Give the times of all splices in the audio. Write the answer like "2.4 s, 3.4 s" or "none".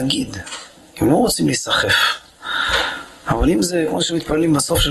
3.2 s